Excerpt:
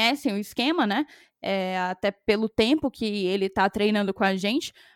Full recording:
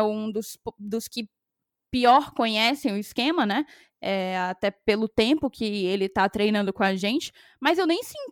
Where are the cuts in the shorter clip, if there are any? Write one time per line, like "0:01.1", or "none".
none